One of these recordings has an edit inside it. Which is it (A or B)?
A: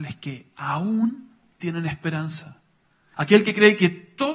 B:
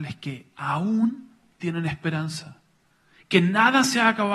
A